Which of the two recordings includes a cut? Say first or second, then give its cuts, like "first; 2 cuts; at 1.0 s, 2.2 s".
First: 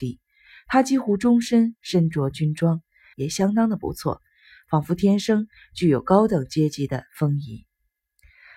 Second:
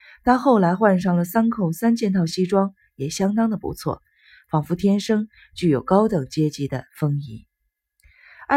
first; 1 cut; at 3.1 s